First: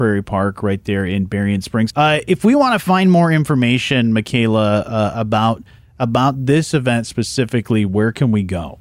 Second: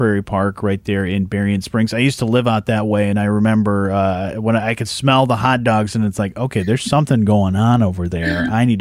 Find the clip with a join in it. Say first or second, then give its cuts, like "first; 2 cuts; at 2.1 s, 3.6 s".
first; 1 cut; at 1.9 s